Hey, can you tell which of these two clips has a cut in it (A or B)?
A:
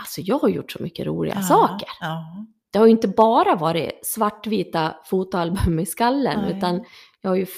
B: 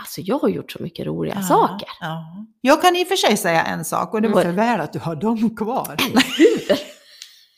B